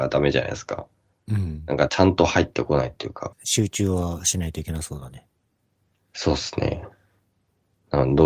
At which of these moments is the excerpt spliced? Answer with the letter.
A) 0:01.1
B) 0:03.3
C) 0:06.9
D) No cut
B